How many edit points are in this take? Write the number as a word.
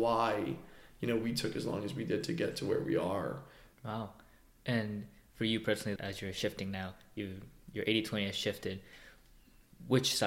two